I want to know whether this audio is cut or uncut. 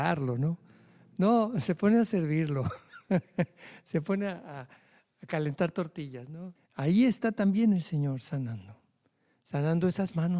cut